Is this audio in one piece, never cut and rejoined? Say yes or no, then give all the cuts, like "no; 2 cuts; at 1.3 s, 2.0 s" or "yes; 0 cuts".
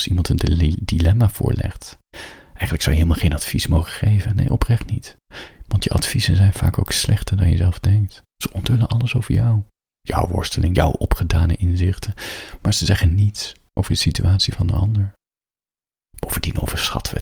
no; 1 cut; at 10.7 s